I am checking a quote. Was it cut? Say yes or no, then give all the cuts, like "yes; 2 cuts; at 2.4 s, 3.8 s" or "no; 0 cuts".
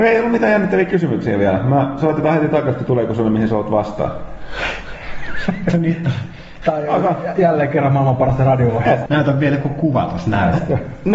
yes; 1 cut; at 9.1 s